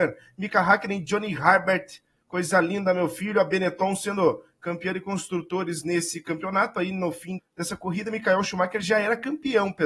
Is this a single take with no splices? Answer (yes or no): no